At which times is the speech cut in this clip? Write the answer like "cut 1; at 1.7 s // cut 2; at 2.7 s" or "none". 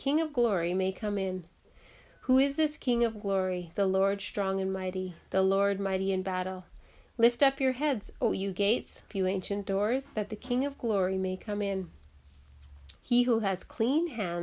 cut 1; at 9.1 s // cut 2; at 13.0 s